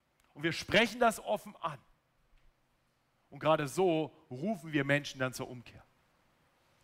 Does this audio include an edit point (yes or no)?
no